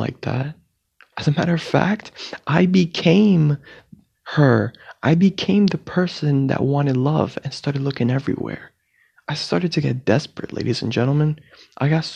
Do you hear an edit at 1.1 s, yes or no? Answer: yes